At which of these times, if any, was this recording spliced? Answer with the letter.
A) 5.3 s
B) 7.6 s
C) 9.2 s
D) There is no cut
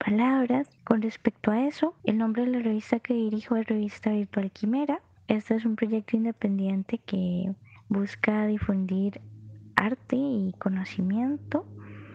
D